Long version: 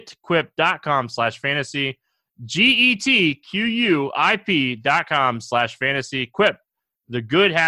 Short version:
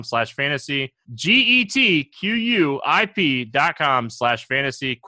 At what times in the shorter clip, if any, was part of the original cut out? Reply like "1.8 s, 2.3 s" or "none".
1.0 s